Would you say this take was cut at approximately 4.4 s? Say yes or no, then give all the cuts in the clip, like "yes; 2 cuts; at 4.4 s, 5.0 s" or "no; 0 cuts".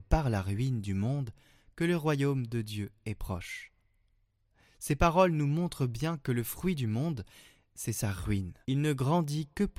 no; 1 cut; at 8.6 s